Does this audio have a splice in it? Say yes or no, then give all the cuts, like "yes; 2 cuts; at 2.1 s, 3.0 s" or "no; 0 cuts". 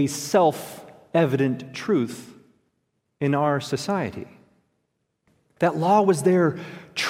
yes; 1 cut; at 5.4 s